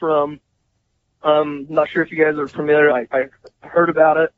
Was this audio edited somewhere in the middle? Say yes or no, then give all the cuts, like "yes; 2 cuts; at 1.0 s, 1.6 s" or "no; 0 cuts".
yes; 1 cut; at 2.9 s